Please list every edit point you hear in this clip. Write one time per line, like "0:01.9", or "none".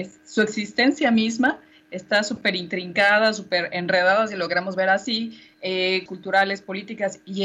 0:06.1